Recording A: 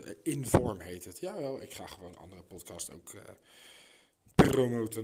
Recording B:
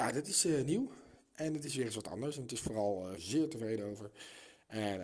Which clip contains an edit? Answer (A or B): B